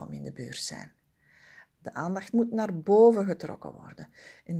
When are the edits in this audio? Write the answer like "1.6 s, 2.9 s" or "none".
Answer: 1.8 s

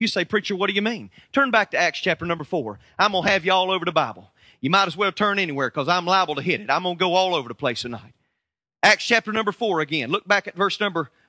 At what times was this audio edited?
none

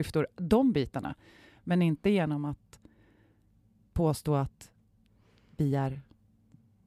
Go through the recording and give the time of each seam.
none

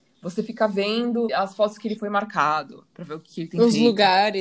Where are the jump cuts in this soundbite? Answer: 1.3 s

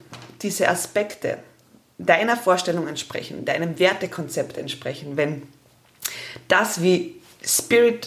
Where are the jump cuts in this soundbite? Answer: none

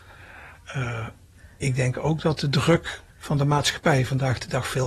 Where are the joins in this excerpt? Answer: 3.1 s

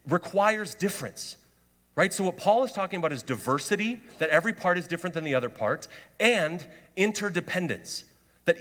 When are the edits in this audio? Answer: none

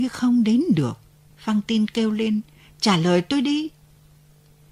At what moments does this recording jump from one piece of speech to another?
1.3 s

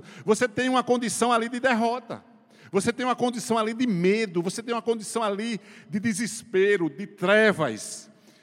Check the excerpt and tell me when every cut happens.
none

